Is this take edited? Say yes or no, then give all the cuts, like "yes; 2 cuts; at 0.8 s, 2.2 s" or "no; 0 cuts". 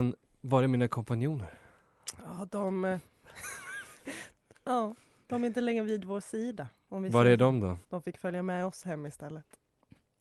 yes; 1 cut; at 7.8 s